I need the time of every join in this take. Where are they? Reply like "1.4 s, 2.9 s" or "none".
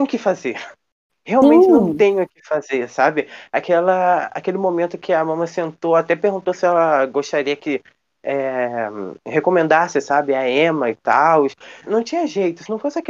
11.9 s